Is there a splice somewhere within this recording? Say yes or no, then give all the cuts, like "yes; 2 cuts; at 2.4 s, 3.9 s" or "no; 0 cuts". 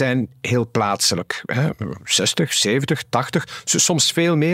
no; 0 cuts